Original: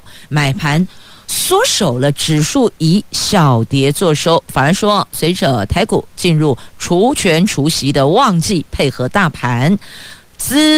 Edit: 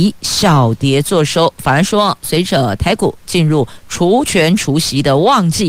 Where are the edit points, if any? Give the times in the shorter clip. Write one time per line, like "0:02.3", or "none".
none